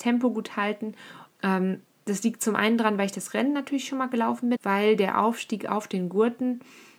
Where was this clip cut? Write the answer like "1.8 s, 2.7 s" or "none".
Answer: 1.3 s, 4.6 s